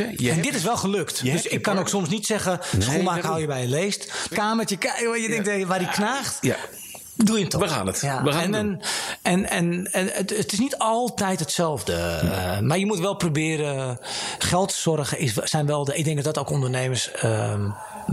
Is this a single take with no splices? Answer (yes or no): no